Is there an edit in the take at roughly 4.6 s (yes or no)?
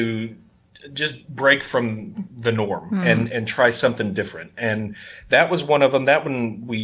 no